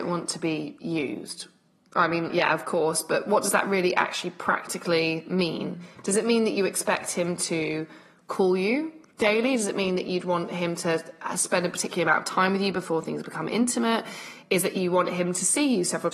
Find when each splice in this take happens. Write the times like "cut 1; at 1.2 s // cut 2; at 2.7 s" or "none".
cut 1; at 2.3 s